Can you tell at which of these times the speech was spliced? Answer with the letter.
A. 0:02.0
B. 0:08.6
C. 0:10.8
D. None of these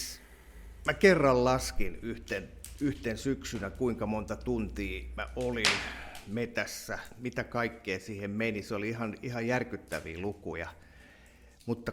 D